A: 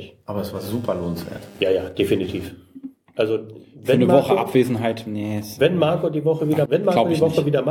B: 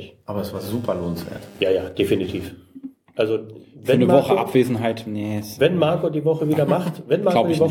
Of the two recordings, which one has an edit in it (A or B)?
A